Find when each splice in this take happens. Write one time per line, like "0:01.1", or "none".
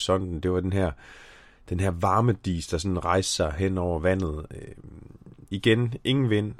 0:05.5